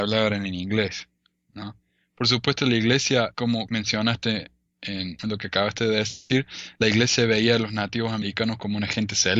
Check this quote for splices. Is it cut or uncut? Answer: uncut